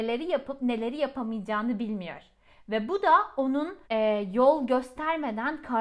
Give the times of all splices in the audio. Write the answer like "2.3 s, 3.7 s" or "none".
3.8 s

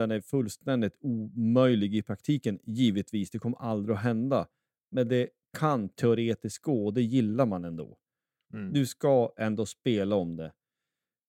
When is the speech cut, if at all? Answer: none

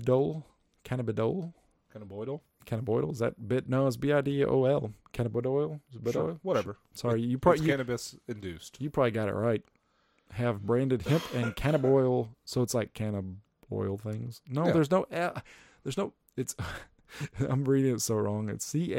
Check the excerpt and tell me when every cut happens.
none

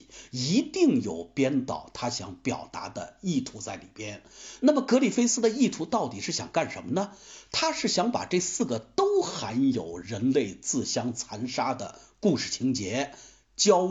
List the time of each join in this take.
none

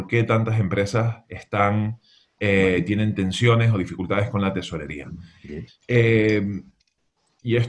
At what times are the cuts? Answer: 5.7 s

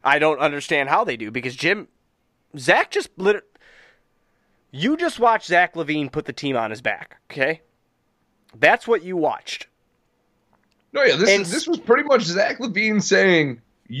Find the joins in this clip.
none

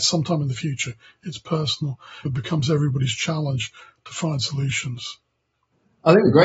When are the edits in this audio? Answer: 2.3 s

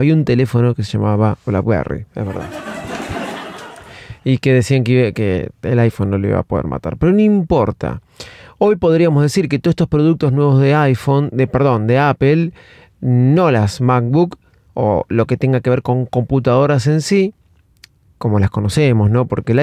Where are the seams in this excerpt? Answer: none

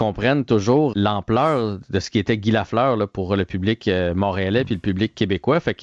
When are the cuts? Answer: 0.9 s

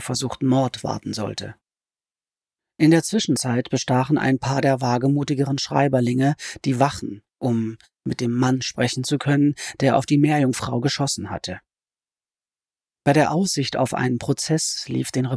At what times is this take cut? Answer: none

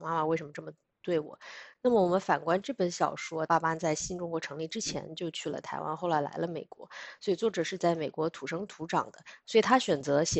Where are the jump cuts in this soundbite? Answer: 3.5 s

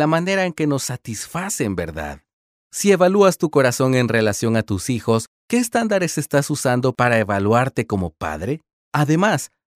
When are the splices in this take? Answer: 8.8 s

